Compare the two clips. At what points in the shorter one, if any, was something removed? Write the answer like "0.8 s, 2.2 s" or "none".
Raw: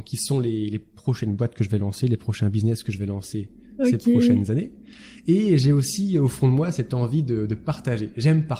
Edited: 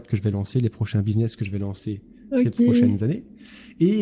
none